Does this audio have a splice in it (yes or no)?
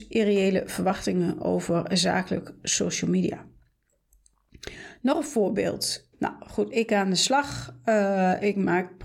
yes